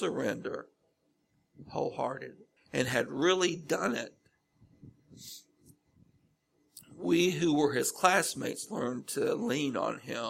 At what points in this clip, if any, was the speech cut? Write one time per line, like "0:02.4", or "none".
0:02.6